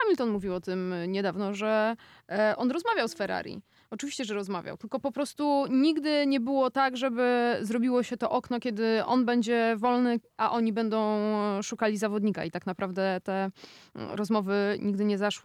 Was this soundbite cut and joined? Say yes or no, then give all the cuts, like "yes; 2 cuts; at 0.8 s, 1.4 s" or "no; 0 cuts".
no; 0 cuts